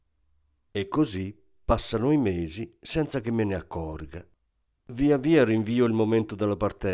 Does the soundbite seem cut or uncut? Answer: uncut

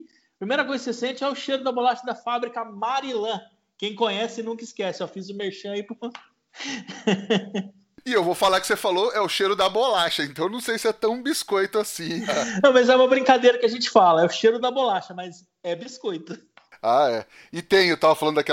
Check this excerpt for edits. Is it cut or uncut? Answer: uncut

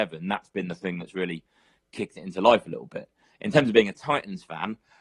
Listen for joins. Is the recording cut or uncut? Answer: uncut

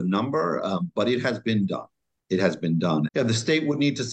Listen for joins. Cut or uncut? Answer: cut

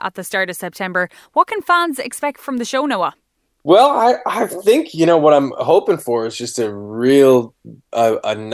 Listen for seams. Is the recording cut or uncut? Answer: uncut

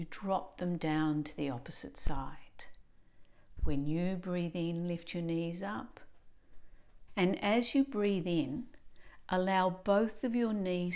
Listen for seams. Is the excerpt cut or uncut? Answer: cut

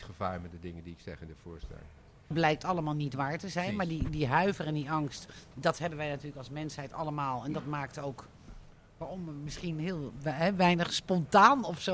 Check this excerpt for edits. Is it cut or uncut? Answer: cut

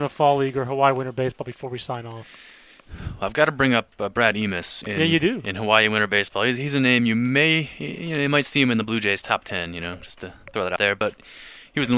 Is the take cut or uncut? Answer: uncut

